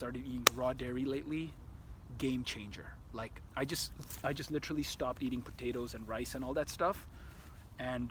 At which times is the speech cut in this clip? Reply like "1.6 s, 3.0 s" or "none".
none